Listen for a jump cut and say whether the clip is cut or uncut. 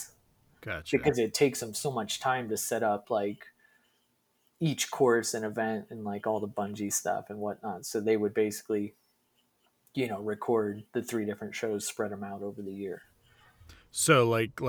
uncut